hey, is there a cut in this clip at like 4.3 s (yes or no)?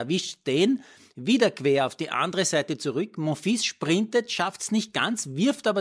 no